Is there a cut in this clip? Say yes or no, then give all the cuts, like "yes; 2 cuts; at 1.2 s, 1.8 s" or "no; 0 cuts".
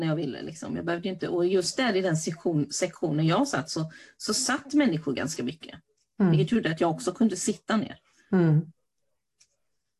no; 0 cuts